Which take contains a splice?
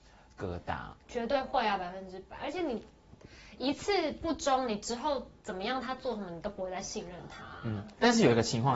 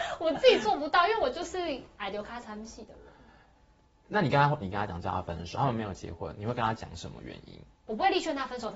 second; 1 cut; at 4.6 s

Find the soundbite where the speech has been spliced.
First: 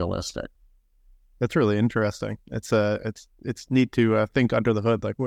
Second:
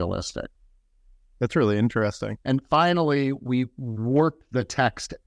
second; 1 cut; at 2.4 s

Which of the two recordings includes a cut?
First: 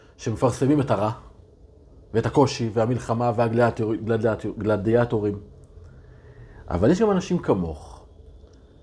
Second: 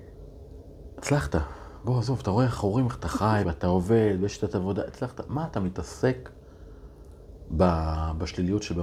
second; 1 cut; at 3.4 s

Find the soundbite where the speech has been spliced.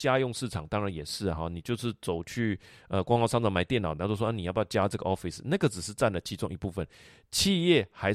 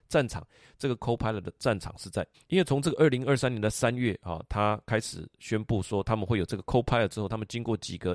second; 1 cut; at 2.3 s

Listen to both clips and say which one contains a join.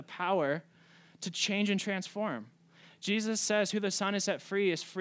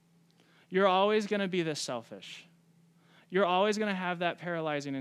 first; 1 cut; at 2.8 s

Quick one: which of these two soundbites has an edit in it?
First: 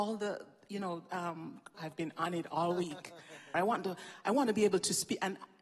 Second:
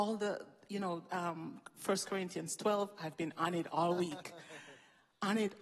first; 2 cuts; at 1.7 s, 3.5 s

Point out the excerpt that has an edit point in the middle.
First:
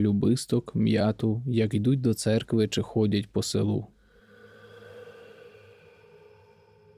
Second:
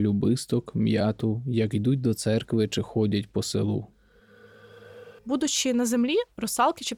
second; 1 cut; at 5.2 s

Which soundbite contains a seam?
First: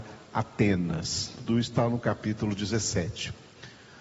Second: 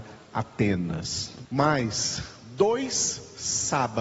second; 1 cut; at 1.4 s

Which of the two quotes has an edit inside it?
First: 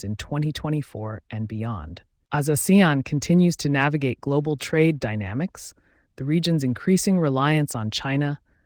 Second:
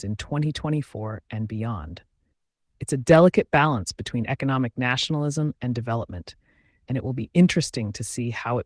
first; 1 cut; at 2.3 s

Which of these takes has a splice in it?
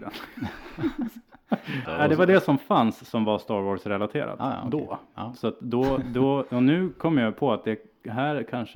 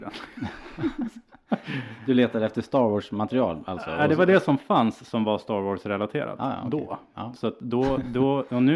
first; 1 cut; at 1.8 s

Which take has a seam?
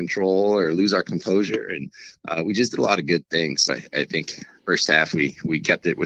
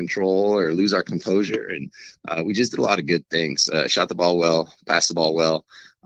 first; 1 cut; at 3.7 s

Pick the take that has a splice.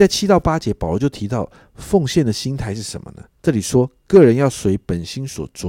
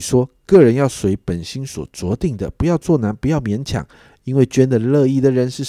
first; 1 cut; at 3.3 s

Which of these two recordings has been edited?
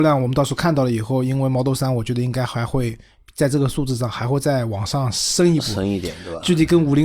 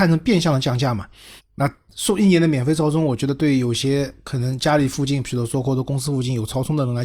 second; 1 cut; at 1.4 s

